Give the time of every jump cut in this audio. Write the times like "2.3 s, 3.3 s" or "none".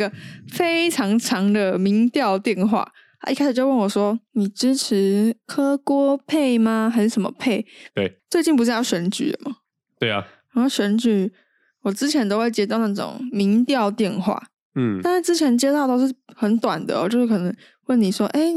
7.9 s